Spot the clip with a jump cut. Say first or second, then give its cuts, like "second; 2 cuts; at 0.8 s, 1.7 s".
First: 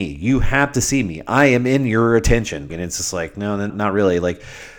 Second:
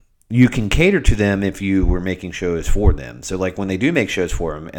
first; 2 cuts; at 2.7 s, 3.7 s